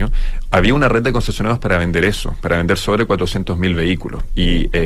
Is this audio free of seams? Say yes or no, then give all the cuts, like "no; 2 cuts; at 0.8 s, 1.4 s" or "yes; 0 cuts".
yes; 0 cuts